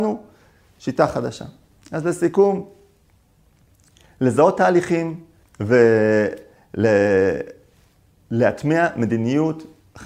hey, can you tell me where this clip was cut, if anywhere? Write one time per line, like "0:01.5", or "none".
0:05.4